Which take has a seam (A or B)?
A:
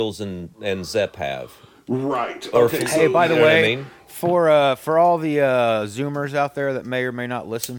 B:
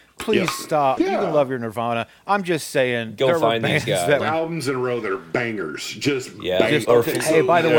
B